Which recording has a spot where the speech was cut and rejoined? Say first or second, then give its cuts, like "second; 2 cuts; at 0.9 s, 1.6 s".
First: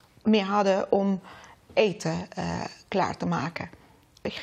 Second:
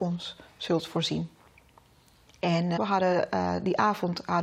second; 1 cut; at 2.8 s